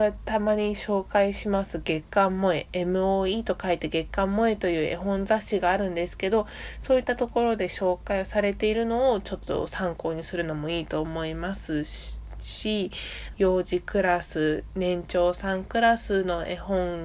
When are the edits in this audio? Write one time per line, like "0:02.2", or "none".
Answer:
0:13.3